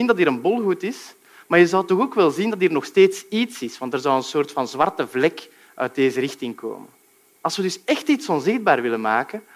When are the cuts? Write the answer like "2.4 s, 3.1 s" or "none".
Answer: none